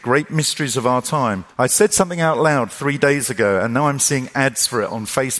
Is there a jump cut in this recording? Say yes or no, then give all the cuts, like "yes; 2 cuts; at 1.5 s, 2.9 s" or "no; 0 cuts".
no; 0 cuts